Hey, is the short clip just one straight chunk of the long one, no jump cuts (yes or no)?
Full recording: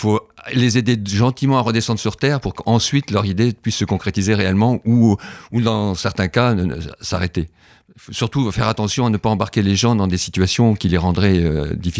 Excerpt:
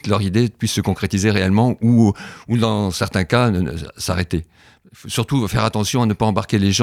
yes